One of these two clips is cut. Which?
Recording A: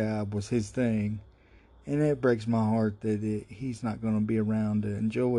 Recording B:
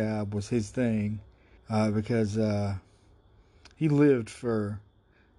B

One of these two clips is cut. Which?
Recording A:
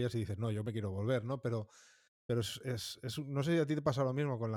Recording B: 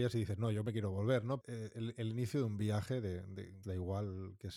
B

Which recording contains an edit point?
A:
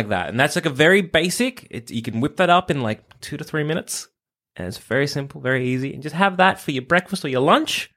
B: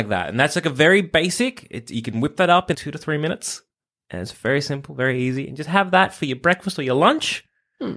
B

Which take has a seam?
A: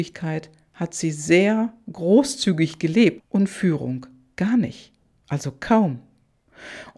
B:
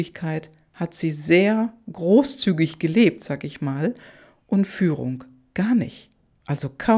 A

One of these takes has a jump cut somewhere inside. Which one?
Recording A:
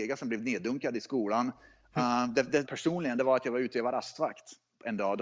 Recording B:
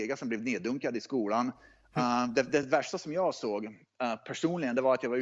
A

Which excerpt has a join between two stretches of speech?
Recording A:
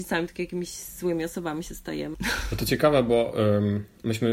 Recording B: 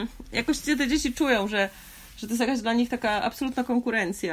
A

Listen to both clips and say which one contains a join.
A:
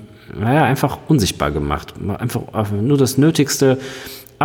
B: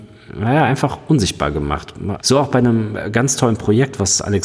B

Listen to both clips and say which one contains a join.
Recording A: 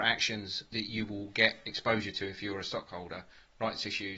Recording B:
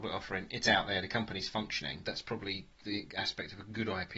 B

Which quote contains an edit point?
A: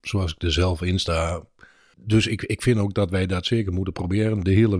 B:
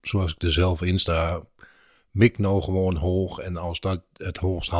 A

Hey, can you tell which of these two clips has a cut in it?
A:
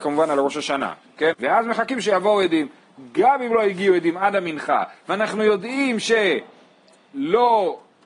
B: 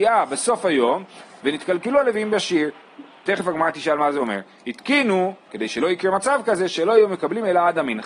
A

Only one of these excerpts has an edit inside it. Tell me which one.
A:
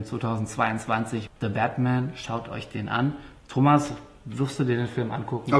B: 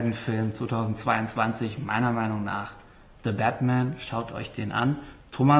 A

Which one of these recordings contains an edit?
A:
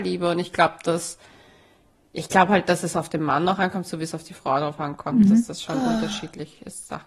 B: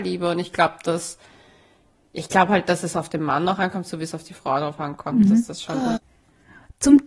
B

